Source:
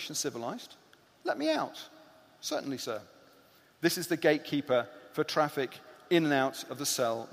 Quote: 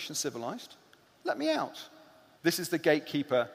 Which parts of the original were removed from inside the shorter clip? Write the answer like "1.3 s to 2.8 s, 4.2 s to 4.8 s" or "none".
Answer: 2.4 s to 3.7 s